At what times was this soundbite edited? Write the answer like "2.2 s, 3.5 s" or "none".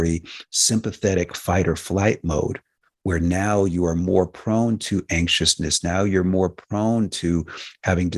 none